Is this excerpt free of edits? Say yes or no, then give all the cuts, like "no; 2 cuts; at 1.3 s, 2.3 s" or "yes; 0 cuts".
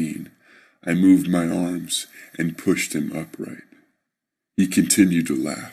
yes; 0 cuts